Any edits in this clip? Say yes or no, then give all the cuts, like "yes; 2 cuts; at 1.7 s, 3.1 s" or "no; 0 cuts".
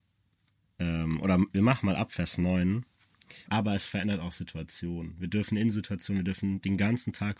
yes; 1 cut; at 3.5 s